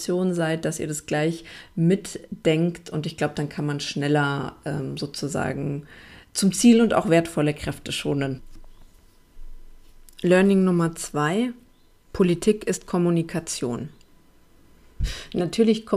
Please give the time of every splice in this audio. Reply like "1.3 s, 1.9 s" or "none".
15.0 s